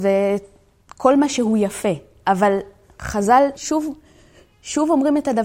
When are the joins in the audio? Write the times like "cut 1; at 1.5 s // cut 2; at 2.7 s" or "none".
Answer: cut 1; at 3.6 s

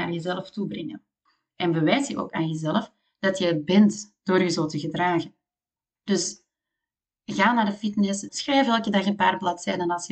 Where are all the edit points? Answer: cut 1; at 8.3 s

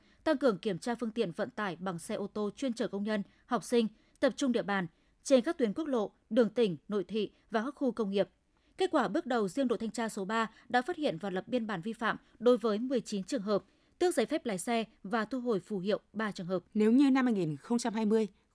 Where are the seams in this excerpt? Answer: cut 1; at 16.7 s

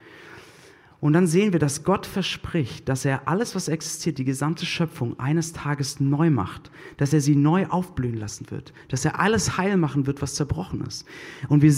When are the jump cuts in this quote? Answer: none

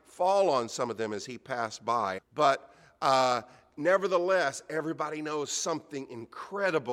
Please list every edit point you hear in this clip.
cut 1; at 2.2 s

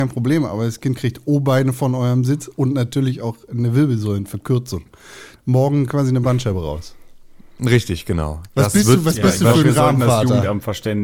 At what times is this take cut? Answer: cut 1; at 5.4 s

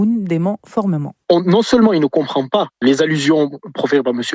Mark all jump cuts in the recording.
cut 1; at 1.2 s

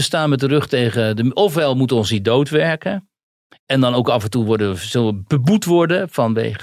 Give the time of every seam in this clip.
none

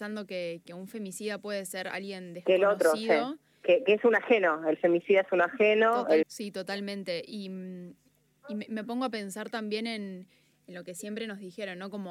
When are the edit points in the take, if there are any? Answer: cut 1; at 6.2 s

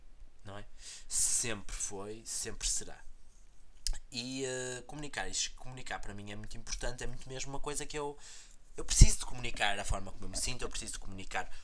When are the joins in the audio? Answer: none

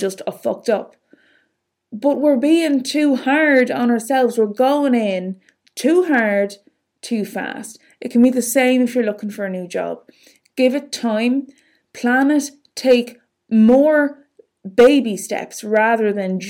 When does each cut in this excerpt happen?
none

